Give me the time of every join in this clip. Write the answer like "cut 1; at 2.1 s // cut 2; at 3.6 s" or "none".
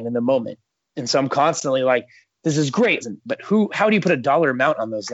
cut 1; at 3.0 s